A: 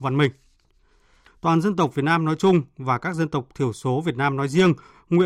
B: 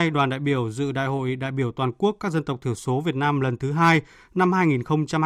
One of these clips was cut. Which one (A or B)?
A